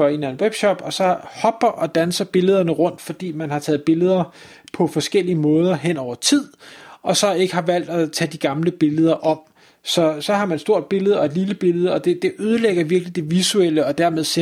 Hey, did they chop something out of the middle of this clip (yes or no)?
yes